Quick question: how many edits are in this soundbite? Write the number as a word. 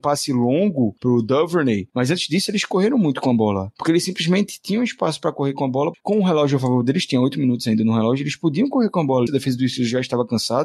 two